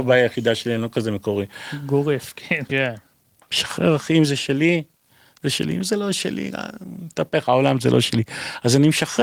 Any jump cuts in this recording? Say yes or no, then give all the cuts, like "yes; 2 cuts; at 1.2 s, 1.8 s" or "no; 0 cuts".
yes; 1 cut; at 2.7 s